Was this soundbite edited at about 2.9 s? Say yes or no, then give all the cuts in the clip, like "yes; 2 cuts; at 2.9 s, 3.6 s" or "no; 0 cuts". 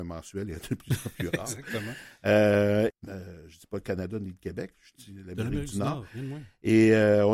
yes; 1 cut; at 2.9 s